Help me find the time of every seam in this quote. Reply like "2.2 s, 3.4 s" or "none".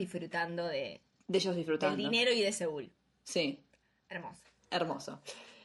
none